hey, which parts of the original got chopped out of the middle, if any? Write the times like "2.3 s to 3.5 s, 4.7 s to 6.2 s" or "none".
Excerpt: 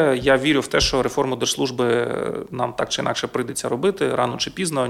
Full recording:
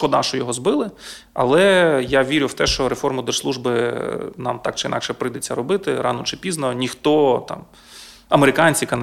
none